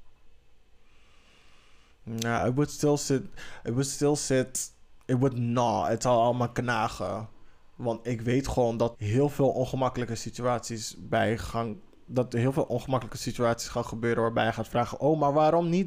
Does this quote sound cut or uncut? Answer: cut